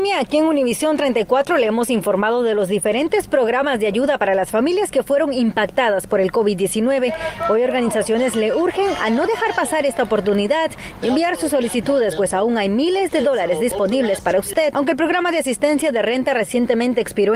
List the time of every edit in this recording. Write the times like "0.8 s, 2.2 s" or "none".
none